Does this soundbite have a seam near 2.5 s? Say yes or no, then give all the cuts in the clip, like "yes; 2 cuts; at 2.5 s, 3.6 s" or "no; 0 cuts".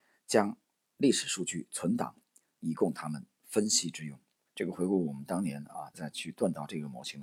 no; 2 cuts; at 4.5 s, 5.9 s